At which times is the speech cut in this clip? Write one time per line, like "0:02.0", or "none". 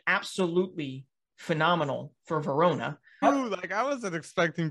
0:03.2